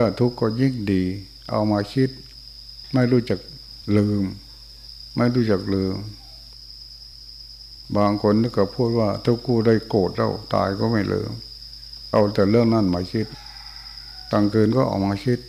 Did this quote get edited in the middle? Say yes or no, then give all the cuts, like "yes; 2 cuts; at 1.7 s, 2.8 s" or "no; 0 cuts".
no; 0 cuts